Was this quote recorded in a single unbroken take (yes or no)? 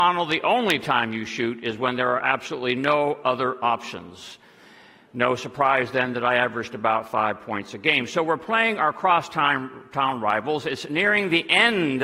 yes